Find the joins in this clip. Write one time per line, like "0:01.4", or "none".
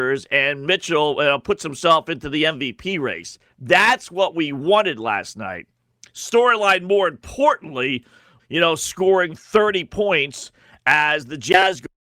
0:06.0
0:08.4